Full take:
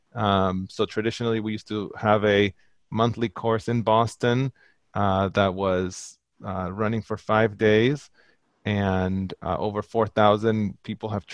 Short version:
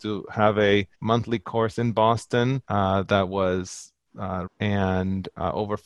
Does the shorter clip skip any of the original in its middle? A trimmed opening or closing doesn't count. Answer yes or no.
yes